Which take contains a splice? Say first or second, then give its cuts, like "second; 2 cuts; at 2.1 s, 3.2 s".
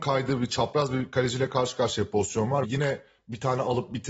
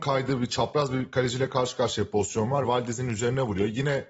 first; 1 cut; at 2.6 s